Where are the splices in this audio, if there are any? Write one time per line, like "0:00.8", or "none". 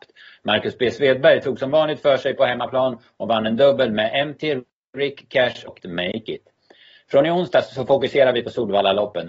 0:05.8